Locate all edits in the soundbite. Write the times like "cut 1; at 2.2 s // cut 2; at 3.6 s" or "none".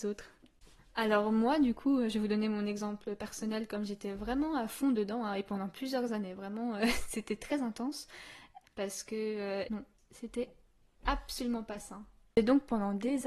cut 1; at 8.6 s // cut 2; at 9.7 s